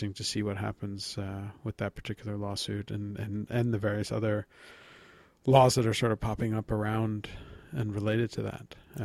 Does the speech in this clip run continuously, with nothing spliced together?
yes; 0 cuts

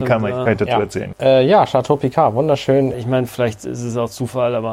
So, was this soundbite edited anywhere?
yes; 2 cuts; at 1.1 s, 2.9 s

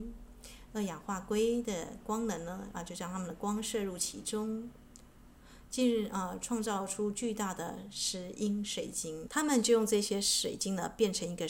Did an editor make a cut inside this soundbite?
yes; 1 cut; at 9.3 s

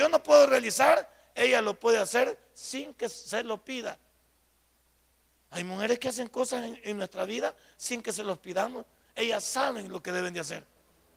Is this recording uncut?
yes; 0 cuts

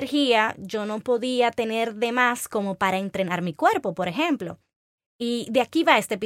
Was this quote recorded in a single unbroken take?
no; 1 cut; at 5.1 s

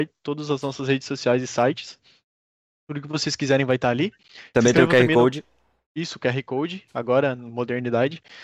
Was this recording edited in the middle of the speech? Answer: no; 0 cuts

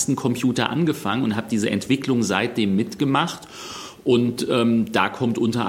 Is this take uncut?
yes; 0 cuts

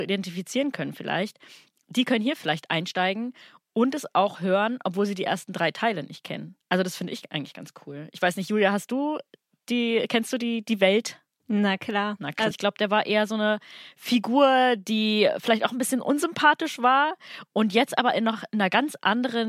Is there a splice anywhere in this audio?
yes; 2 cuts; at 6.6 s, 12.5 s

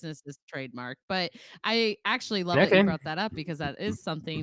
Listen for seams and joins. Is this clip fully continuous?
yes; 0 cuts

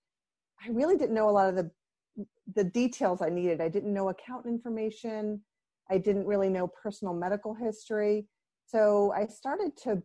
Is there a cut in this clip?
no; 0 cuts

